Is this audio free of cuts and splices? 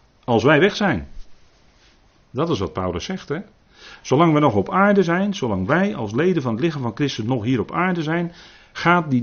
yes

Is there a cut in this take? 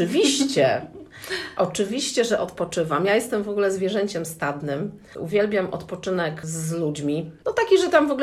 no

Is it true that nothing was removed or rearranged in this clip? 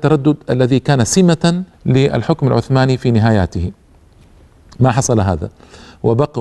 no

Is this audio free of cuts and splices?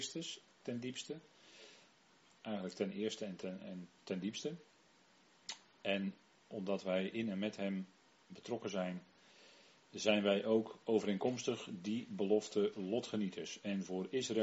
yes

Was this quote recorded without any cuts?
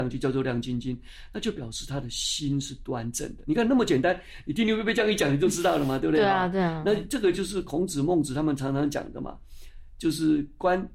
yes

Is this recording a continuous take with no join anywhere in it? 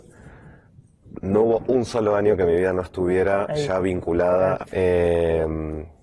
no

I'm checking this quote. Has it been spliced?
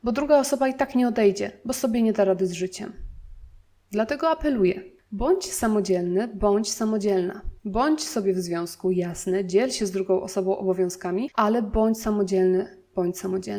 yes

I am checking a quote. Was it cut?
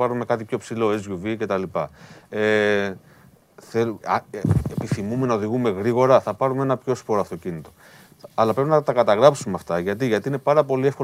yes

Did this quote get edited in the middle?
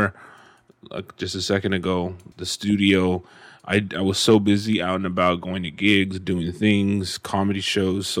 yes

